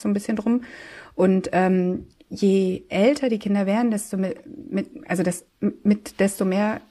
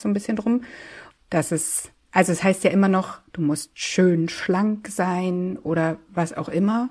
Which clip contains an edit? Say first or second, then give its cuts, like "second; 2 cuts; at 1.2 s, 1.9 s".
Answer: second; 1 cut; at 1.1 s